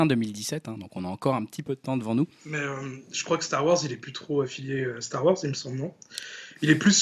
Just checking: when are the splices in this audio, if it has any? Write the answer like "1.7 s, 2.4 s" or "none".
none